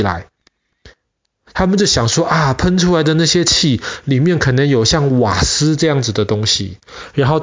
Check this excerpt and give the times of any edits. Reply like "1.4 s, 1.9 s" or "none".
none